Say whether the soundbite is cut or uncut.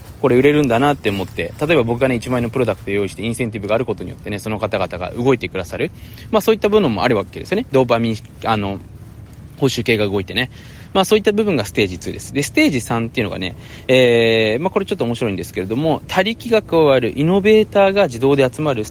uncut